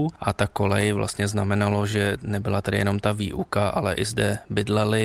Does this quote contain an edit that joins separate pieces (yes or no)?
no